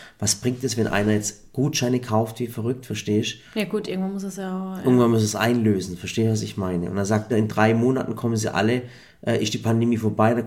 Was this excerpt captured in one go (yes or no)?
no